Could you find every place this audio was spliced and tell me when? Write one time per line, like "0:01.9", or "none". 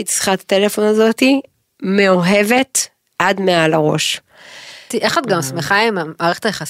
0:04.9